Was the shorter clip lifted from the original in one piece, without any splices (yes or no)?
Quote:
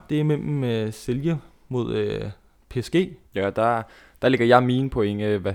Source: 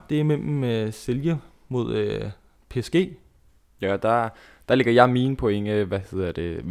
no